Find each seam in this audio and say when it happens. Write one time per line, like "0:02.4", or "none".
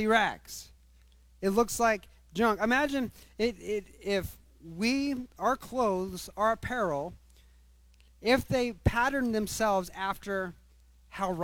none